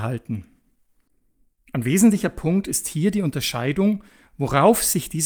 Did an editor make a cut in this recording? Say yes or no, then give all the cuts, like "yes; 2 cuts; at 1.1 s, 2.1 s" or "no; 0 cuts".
no; 0 cuts